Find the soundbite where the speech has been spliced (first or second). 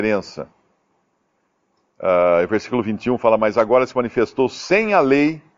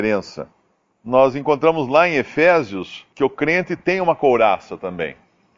second